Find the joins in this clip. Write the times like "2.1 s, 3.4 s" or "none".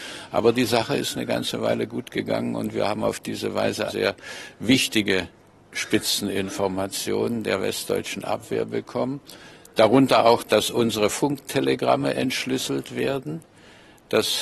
3.9 s